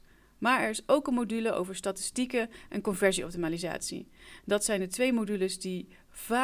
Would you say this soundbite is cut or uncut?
uncut